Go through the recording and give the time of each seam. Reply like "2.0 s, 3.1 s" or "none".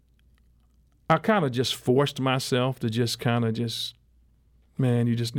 none